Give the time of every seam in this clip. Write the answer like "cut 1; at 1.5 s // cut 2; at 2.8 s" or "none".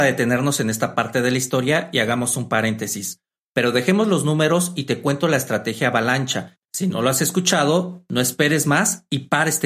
cut 1; at 3.5 s // cut 2; at 6.6 s